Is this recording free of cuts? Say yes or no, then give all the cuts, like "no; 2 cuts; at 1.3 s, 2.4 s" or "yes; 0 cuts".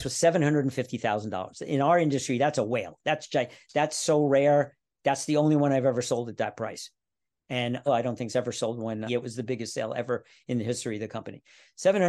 no; 2 cuts; at 7.9 s, 9.1 s